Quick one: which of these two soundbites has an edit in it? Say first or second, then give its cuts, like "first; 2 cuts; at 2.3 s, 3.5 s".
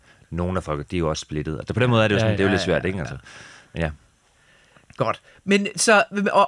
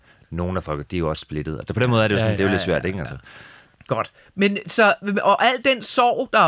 second; 1 cut; at 3.7 s